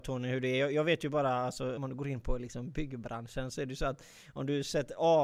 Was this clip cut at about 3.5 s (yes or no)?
no